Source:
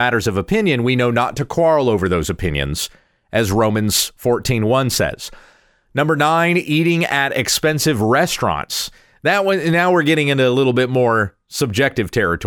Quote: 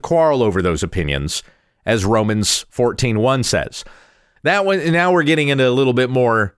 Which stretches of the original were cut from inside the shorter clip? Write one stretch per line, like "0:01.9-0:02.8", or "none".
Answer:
0:05.8-0:09.2